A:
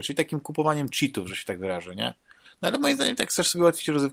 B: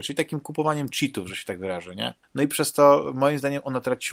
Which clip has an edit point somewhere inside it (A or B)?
B